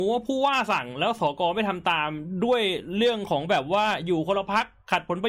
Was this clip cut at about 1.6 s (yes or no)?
no